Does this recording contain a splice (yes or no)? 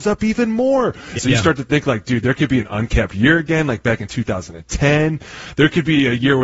yes